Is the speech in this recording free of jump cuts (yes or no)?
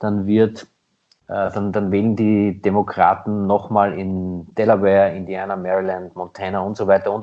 yes